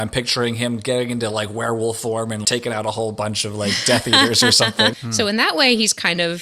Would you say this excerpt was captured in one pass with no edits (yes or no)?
no